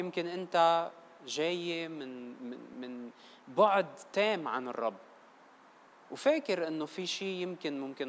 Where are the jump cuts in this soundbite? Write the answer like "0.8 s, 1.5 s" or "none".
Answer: 2.7 s

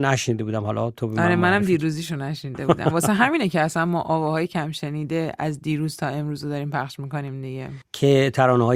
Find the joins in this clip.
none

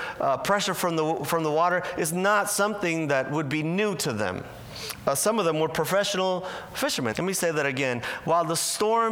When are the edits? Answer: 7.1 s

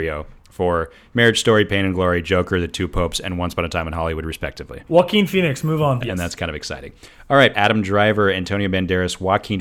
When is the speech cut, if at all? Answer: 6.0 s, 7.5 s

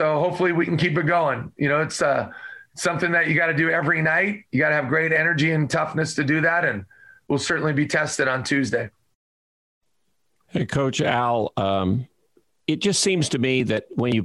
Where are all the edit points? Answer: none

